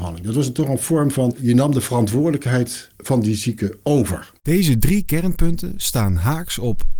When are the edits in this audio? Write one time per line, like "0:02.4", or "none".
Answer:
0:04.4